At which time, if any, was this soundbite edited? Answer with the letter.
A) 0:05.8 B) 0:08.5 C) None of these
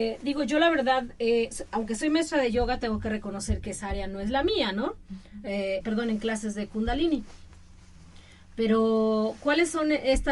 A